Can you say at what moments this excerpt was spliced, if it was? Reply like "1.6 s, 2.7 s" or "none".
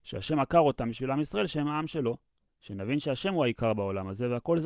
2.5 s

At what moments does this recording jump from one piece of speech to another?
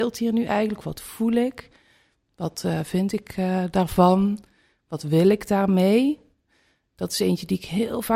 none

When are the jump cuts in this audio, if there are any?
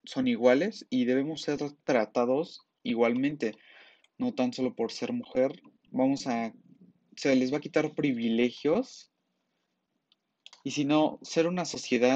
10.5 s

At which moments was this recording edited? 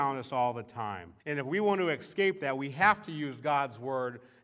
1.2 s

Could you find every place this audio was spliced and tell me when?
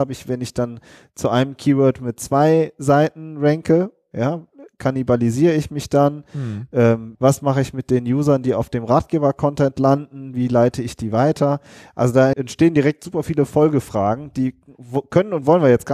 7.1 s, 12.3 s

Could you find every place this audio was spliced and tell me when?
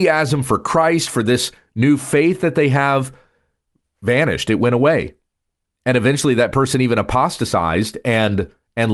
3.8 s

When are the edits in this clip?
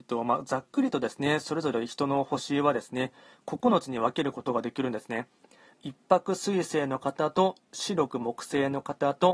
5.7 s

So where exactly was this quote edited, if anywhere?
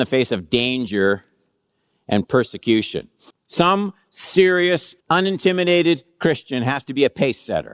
3.3 s, 5.0 s

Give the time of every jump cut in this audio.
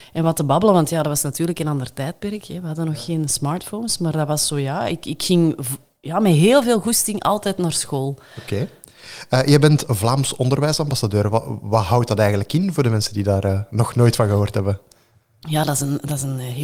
none

